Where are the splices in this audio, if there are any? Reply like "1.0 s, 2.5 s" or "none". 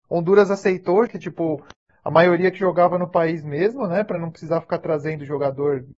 1.1 s

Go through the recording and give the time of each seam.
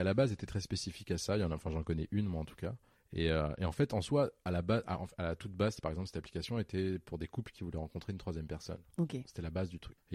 none

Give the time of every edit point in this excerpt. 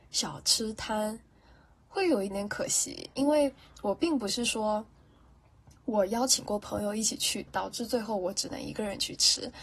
2.3 s, 7.5 s

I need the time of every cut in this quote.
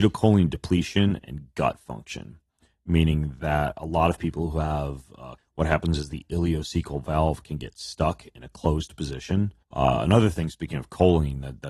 5.4 s, 9.6 s

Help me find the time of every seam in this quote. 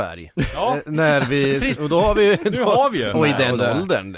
1.8 s, 3.1 s

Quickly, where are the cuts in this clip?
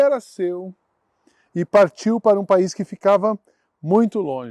none

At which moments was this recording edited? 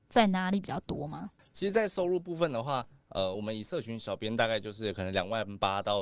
none

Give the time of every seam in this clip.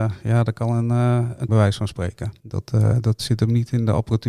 1.5 s

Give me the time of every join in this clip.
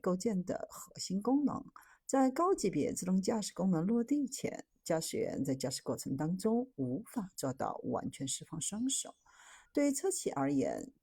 9.7 s

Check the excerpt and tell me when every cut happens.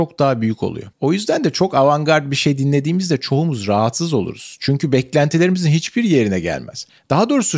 0.9 s

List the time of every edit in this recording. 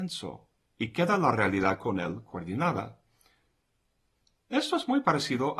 none

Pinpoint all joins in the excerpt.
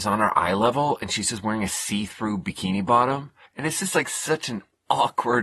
3.5 s

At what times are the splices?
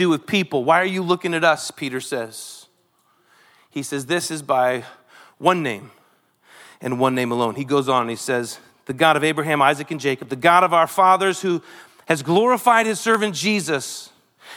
none

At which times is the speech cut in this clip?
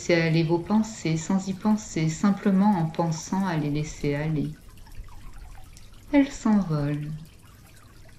6.0 s

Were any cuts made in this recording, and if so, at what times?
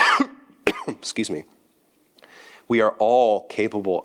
none

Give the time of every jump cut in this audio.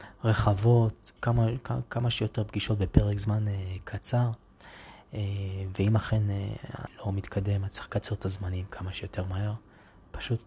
1.2 s, 6.9 s

